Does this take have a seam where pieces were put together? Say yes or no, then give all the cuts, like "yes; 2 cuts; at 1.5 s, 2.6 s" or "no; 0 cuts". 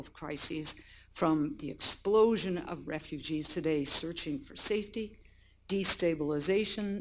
no; 0 cuts